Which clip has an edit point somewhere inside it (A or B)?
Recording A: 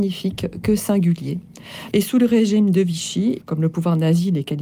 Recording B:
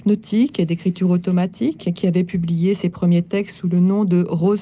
A